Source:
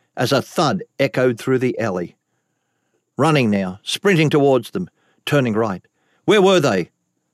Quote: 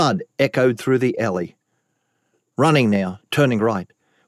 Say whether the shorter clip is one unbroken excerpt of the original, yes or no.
no